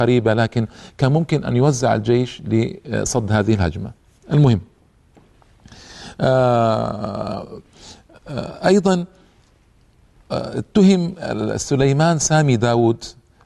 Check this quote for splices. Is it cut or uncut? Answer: uncut